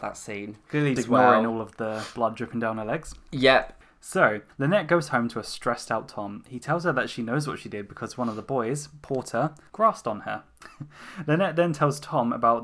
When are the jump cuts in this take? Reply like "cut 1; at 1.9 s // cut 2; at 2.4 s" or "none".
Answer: cut 1; at 1.0 s